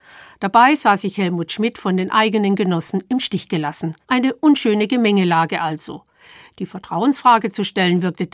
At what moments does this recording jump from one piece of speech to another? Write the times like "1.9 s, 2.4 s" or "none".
4.0 s